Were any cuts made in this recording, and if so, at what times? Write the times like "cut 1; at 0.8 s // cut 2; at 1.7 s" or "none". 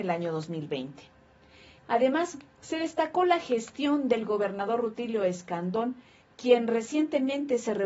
cut 1; at 1.8 s